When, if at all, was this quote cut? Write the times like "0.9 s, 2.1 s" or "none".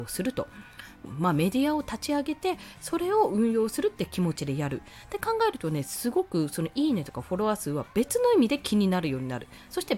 1.0 s